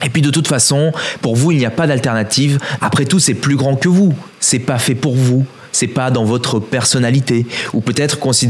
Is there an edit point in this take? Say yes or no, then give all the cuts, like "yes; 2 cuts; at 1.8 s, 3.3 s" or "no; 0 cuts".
yes; 1 cut; at 2.8 s